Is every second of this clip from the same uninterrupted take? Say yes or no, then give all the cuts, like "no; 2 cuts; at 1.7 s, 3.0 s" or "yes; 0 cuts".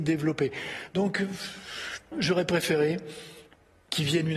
no; 1 cut; at 2.1 s